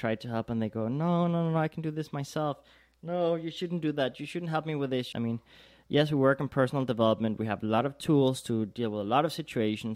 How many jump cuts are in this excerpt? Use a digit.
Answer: 1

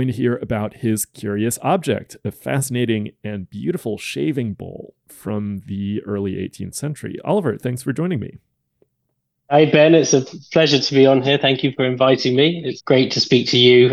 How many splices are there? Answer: 1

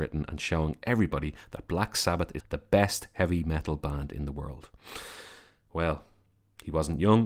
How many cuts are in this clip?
1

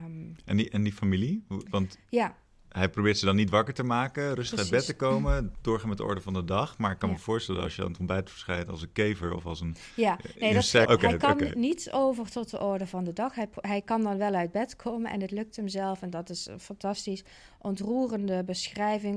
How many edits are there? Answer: 1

